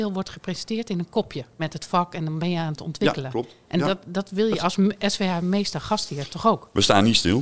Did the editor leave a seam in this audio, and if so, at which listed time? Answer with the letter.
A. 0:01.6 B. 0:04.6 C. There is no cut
A